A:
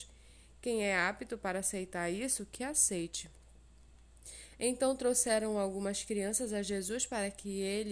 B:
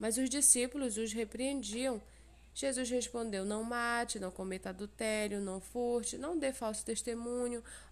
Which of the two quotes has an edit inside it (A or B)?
B